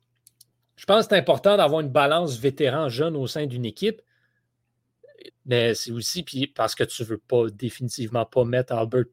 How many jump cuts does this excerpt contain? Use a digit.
1